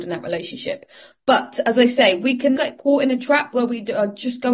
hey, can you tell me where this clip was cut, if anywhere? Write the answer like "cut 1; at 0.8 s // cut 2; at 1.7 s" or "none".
cut 1; at 2.6 s